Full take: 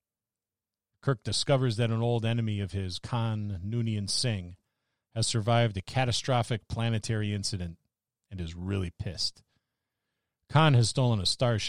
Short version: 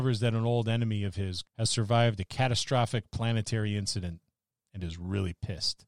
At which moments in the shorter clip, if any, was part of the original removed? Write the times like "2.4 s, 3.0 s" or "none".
1.4 s